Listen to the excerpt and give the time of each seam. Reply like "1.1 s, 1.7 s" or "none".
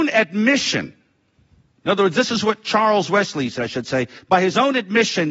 3.6 s